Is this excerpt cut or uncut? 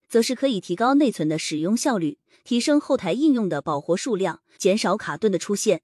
cut